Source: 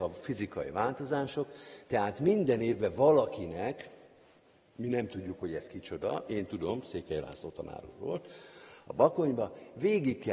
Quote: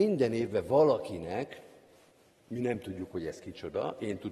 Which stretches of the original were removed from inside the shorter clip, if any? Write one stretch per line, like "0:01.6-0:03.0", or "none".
none

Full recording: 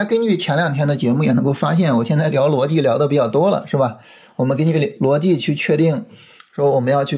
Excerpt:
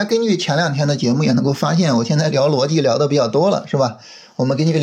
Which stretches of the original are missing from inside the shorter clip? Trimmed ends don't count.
none

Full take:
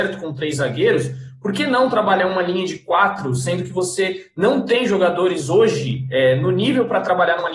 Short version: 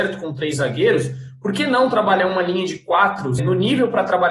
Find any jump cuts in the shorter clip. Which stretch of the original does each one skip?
0:03.4-0:06.4

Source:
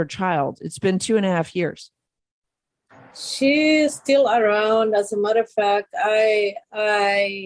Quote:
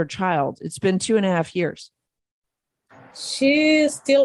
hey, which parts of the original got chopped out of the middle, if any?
none

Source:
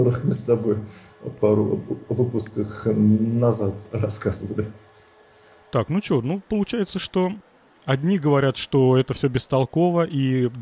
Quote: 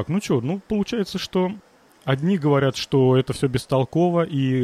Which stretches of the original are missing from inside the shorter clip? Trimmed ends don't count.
none

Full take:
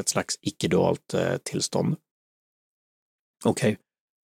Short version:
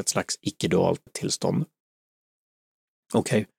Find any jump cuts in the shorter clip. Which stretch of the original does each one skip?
0:01.1-0:01.4

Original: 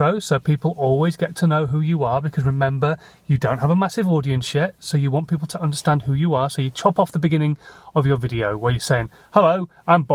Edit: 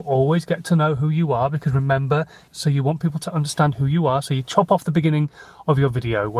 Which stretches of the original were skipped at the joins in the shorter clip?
0:03.2-0:04.8

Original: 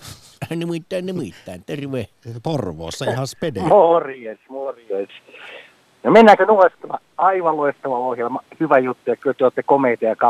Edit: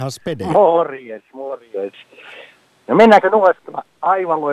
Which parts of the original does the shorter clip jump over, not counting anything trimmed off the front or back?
none

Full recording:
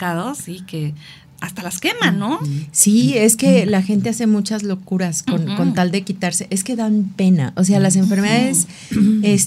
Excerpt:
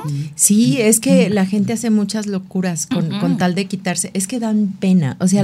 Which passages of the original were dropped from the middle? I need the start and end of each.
none

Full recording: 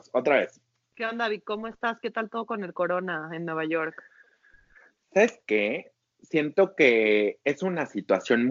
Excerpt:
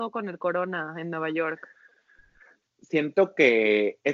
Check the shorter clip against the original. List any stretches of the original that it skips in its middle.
0:05.0-0:06.1

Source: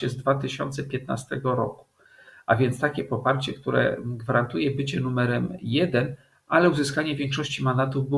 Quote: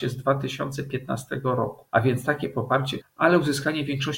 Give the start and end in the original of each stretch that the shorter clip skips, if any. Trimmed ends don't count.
0:01.9-0:02.4
0:03.6-0:06.3

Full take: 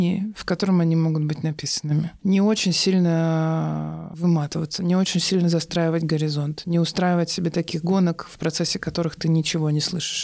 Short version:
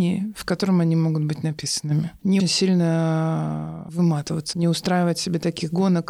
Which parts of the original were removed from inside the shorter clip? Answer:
0:02.4-0:02.6
0:04.8-0:06.6

